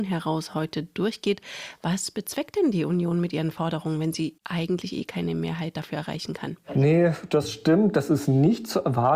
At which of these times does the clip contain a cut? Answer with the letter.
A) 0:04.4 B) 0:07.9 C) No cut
C